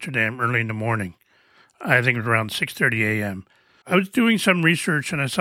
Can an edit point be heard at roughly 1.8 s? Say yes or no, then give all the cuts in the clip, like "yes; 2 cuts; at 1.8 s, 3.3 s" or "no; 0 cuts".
no; 1 cut; at 3.8 s